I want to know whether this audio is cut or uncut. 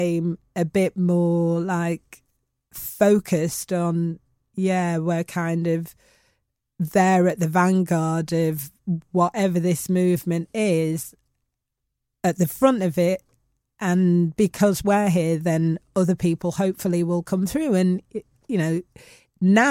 uncut